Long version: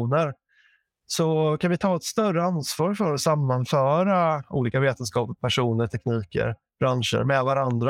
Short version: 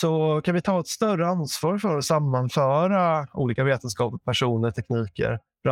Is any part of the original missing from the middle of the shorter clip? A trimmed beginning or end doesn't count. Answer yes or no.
no